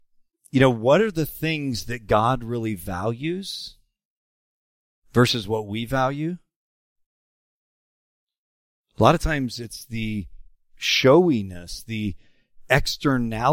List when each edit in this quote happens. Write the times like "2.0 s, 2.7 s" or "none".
none